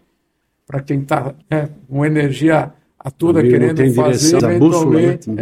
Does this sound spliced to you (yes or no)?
yes